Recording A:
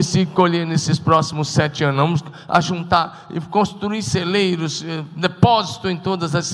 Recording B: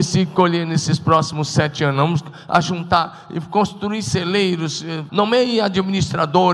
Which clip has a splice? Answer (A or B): B